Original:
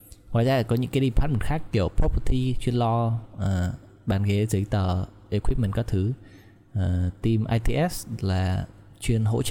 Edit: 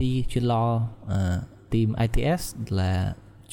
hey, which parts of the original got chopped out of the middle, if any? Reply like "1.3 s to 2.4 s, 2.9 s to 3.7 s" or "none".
4.0 s to 7.2 s